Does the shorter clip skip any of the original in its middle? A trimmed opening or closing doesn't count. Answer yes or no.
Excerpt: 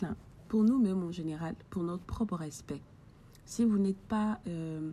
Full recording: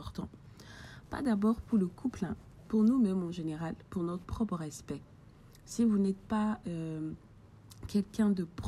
no